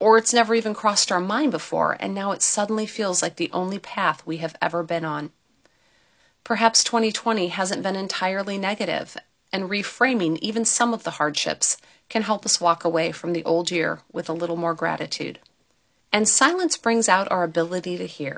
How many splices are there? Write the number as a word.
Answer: one